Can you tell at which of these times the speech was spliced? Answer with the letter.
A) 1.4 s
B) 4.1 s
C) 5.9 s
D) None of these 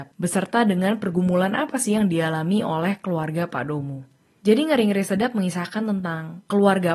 D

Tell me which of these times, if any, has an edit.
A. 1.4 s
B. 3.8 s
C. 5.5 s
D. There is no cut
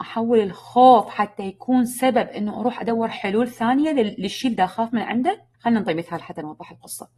C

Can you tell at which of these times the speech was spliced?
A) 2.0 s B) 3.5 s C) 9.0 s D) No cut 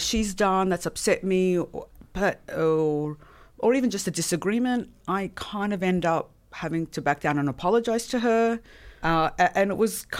C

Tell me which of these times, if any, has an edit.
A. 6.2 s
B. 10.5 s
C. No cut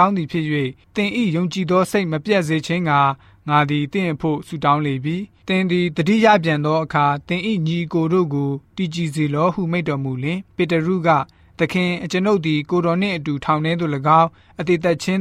B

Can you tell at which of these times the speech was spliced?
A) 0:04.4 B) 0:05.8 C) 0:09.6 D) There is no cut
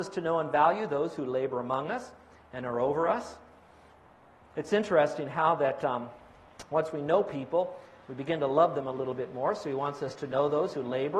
D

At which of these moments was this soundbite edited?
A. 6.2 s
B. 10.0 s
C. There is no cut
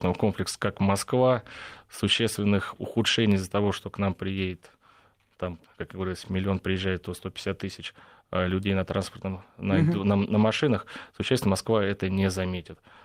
C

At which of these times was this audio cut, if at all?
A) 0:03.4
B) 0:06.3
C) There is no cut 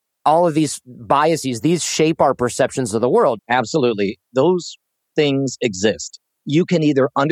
A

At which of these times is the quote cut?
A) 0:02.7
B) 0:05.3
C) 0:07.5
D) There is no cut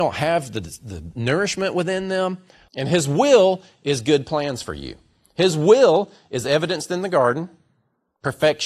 A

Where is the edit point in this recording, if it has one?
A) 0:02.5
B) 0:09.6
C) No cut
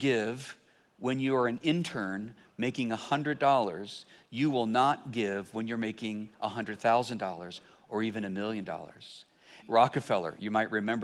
B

